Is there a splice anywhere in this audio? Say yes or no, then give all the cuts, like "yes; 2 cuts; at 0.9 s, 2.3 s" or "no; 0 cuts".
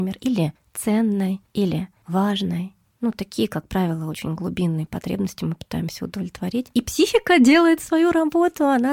no; 0 cuts